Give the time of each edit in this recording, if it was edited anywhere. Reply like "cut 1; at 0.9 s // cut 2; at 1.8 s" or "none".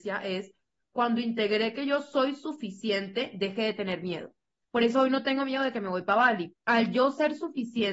cut 1; at 6.5 s